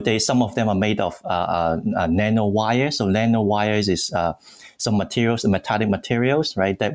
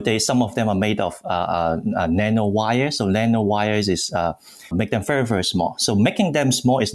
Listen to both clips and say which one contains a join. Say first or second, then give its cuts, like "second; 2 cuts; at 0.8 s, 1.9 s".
second; 1 cut; at 4.7 s